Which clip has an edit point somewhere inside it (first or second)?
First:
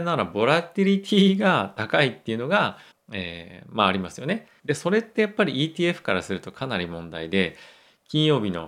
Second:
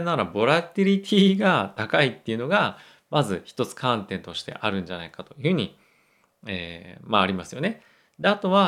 first